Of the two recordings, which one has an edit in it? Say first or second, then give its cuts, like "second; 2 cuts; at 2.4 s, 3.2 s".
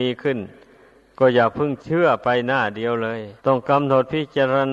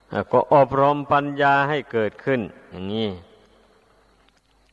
first; 1 cut; at 3.4 s